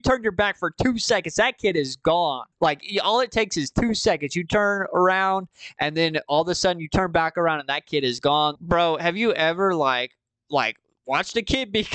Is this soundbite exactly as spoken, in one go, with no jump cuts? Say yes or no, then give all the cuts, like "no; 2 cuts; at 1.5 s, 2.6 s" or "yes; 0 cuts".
no; 2 cuts; at 2.5 s, 8.6 s